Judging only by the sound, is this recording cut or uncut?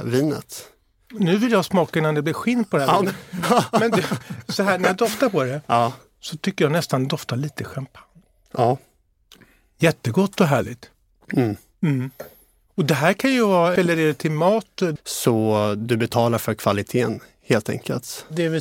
cut